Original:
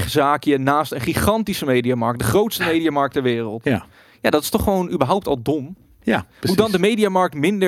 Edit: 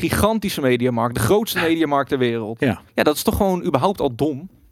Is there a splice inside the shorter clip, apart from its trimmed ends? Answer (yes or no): yes